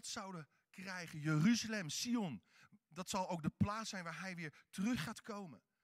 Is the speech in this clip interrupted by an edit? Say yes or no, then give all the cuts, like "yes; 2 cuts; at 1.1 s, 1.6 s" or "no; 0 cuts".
no; 0 cuts